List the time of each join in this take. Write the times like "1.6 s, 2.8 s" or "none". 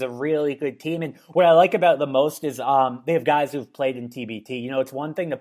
none